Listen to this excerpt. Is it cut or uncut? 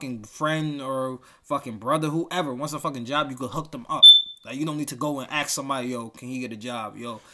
uncut